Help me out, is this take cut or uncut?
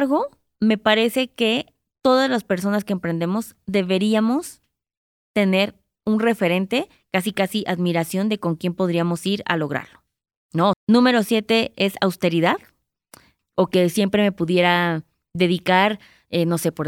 cut